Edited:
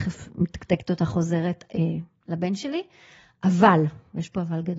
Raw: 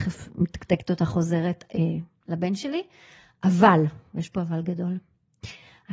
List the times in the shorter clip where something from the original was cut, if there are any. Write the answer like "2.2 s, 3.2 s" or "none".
none